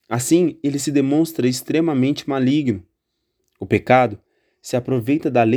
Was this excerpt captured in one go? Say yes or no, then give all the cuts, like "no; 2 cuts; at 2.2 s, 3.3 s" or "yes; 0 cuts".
no; 1 cut; at 3.4 s